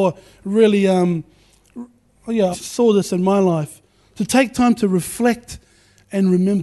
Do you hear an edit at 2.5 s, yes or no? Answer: yes